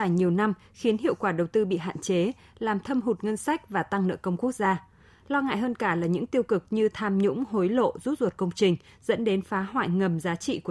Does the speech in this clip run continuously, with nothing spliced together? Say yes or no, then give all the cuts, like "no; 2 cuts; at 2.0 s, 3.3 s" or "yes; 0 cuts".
yes; 0 cuts